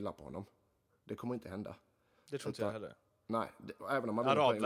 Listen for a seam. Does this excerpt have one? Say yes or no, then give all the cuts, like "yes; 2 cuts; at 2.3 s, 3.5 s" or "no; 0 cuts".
no; 0 cuts